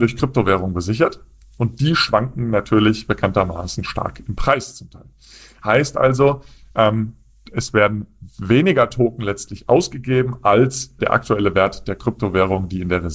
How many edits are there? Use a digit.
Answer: 2